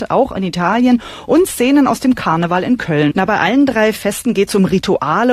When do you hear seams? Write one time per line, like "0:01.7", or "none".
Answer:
0:03.1